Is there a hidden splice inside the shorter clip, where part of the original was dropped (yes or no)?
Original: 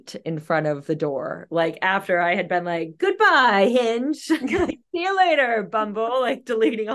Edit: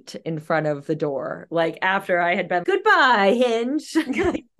yes